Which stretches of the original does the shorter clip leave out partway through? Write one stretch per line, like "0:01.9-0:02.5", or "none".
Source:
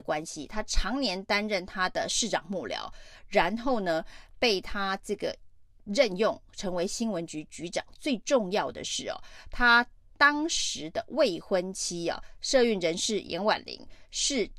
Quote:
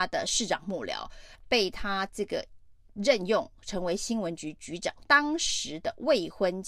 0:03.2-0:04.3
0:08.0-0:10.1